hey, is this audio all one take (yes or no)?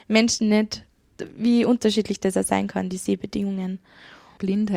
yes